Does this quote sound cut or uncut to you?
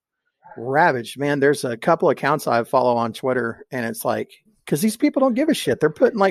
uncut